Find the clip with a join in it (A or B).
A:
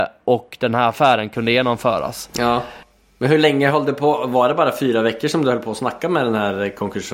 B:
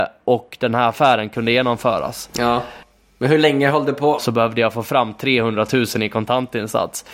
B